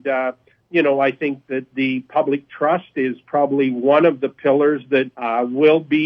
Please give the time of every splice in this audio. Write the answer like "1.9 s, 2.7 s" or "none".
5.1 s